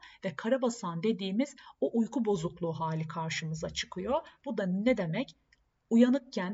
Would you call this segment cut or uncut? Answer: uncut